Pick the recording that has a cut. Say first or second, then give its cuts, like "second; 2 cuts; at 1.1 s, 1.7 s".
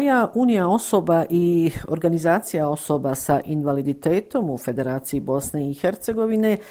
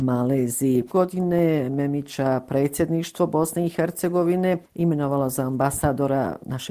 second; 1 cut; at 0.9 s